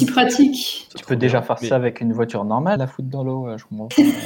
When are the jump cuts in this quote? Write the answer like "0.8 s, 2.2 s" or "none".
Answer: 2.8 s